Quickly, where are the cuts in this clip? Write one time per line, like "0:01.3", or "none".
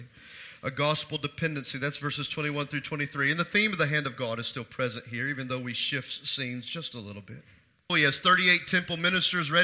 0:07.9